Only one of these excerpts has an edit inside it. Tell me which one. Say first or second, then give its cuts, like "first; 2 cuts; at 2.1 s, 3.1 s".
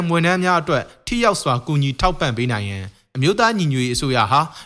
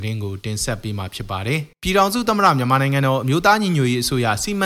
second; 1 cut; at 1.7 s